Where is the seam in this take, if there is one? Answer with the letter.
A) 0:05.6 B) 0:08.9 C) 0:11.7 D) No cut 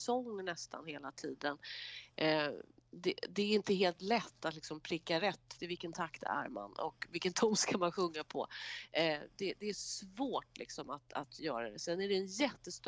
A